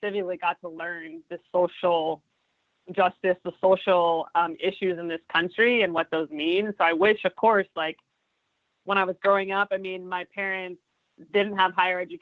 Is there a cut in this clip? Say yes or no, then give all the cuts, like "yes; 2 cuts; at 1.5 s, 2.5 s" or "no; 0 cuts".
no; 0 cuts